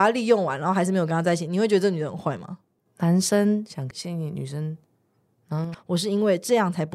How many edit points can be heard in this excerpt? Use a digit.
2